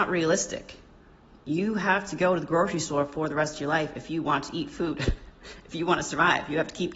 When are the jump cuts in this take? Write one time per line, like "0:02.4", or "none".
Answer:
none